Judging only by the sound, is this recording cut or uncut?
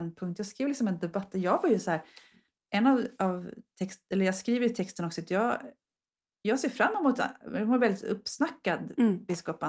uncut